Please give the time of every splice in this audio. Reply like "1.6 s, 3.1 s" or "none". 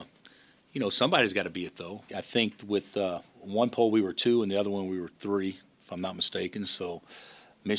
2.1 s